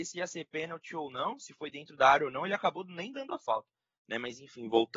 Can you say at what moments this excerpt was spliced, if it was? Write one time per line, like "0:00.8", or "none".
none

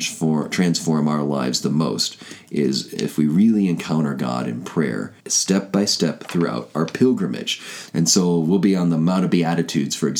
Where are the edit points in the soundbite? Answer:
0:05.2
0:07.9

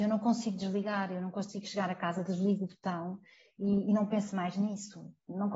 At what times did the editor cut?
none

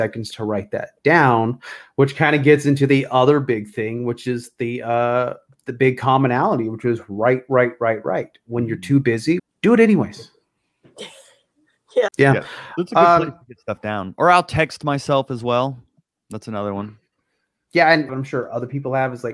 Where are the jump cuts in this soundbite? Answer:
0:09.4
0:12.1
0:18.1

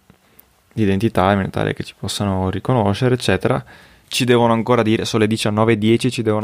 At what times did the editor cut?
0:04.0

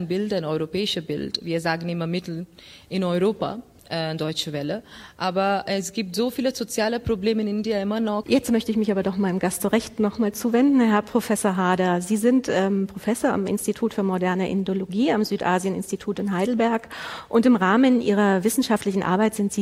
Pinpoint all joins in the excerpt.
0:08.2

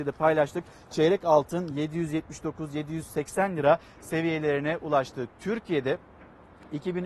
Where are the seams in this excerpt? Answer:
none

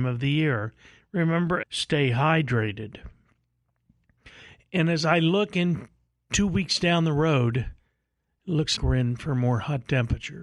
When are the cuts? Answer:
0:01.6
0:08.8

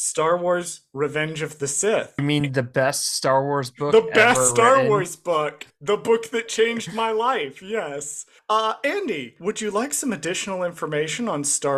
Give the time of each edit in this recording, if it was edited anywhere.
0:09.4

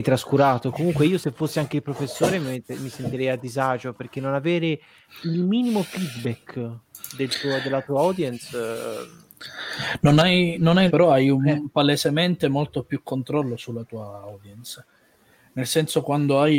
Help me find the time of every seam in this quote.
0:05.2
0:10.9

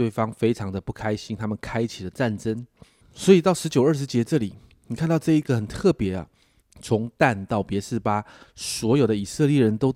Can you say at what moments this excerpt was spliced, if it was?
0:03.0
0:06.6

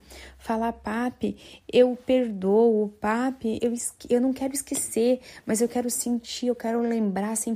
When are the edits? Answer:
0:03.6

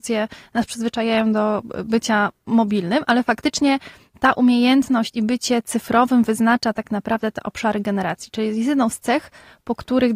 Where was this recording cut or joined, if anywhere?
none

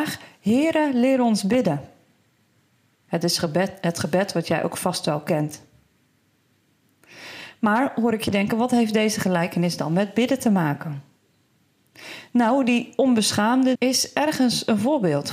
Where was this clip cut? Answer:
0:03.0
0:13.8

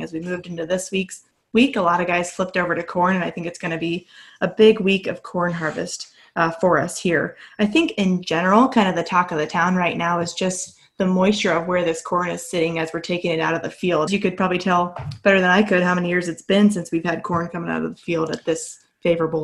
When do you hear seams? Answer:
0:14.1

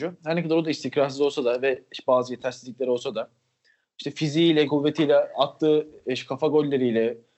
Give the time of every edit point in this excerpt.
0:04.7

